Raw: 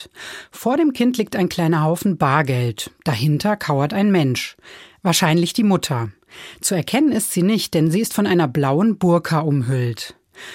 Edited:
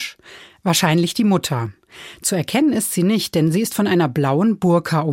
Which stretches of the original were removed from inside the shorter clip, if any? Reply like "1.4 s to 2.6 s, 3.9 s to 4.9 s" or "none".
none